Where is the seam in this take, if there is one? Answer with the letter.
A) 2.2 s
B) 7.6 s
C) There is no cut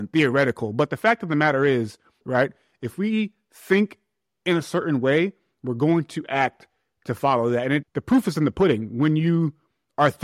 A